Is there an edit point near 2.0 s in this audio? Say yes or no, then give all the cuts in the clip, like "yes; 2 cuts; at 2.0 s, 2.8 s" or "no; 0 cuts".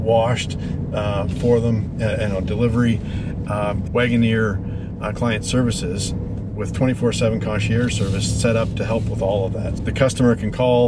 no; 2 cuts; at 3.9 s, 9.8 s